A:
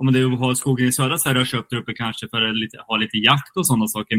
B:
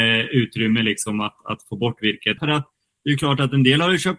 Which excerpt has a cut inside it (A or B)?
B